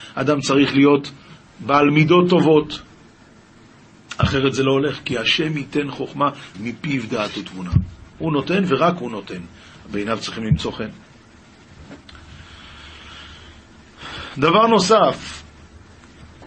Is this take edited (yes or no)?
yes